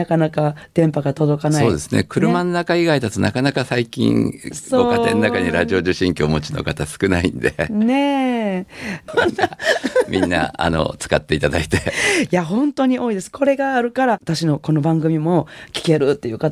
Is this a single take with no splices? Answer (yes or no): no